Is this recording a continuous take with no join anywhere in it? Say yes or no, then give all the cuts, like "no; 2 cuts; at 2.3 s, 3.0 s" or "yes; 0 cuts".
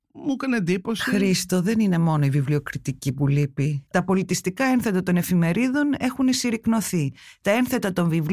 no; 1 cut; at 3.9 s